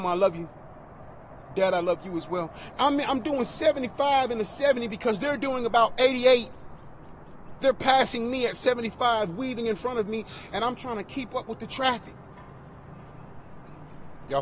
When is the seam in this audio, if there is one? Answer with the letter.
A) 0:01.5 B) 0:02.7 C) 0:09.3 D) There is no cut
D